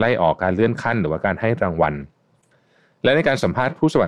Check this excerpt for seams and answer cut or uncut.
uncut